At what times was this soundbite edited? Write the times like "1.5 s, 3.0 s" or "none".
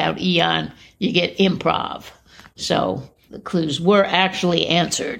3.3 s

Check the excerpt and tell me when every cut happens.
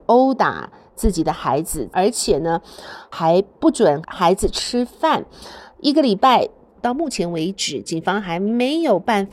1.9 s, 6.8 s

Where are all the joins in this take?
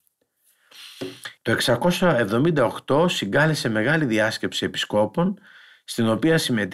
1.4 s

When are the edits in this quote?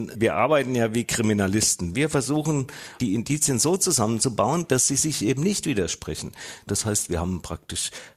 1.9 s, 6.7 s

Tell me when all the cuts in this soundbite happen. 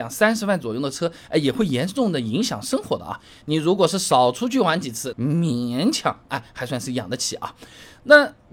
3.4 s, 5.1 s

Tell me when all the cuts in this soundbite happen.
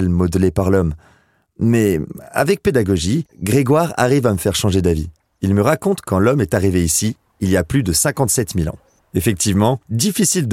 9.0 s

